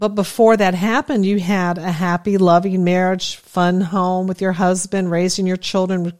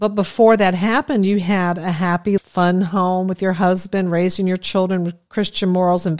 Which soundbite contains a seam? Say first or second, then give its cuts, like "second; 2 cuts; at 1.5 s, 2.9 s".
second; 1 cut; at 2.4 s